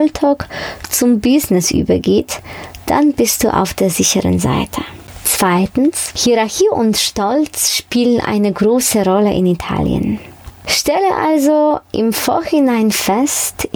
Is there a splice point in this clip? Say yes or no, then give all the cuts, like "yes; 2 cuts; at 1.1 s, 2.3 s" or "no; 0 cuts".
yes; 1 cut; at 10.5 s